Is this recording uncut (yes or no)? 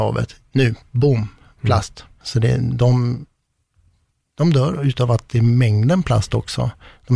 no